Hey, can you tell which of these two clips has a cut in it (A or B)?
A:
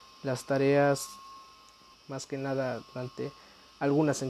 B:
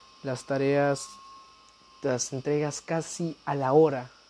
A